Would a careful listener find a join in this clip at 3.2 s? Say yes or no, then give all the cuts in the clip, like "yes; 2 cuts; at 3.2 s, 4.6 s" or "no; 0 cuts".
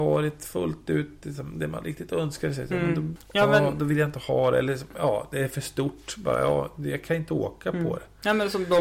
yes; 1 cut; at 3.2 s